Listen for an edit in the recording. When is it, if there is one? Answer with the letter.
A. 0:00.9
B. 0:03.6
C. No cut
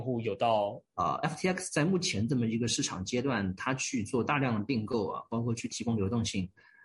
A